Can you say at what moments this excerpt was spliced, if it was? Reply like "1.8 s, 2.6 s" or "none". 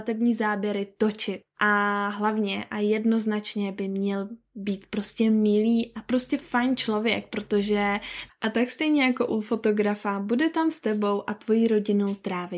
none